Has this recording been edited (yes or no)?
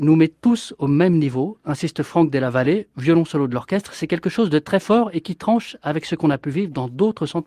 no